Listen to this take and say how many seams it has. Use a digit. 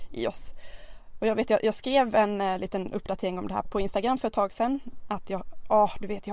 1